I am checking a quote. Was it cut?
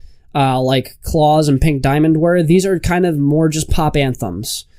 no; 0 cuts

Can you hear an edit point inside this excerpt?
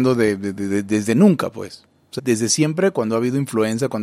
yes; 1 cut; at 2.2 s

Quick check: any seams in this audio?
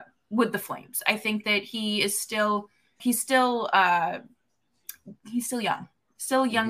yes; 1 cut; at 3.0 s

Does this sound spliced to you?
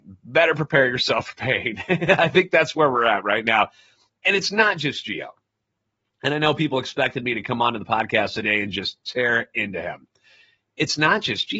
no; 0 cuts

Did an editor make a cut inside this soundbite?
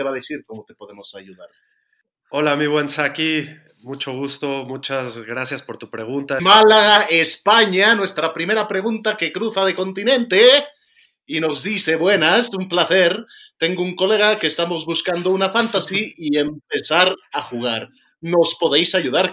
yes; 1 cut; at 6.4 s

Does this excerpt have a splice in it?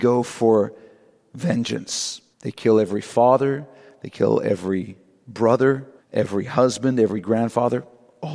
yes; 2 cuts; at 2.3 s, 6.0 s

